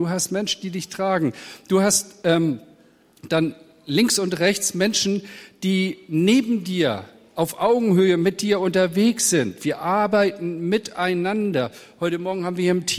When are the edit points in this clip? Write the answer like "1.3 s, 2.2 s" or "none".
none

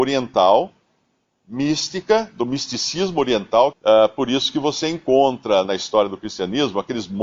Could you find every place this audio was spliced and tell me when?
3.7 s, 5.6 s

